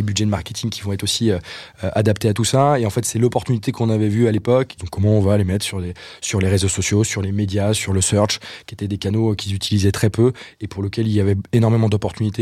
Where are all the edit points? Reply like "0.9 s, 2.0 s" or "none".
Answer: 4.8 s